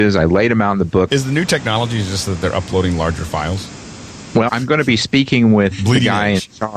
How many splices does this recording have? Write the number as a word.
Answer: two